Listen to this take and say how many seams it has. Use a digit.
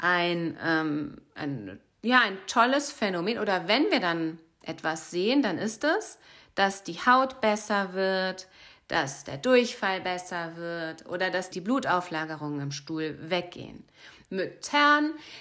3